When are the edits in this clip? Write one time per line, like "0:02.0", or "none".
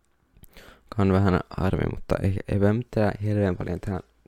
none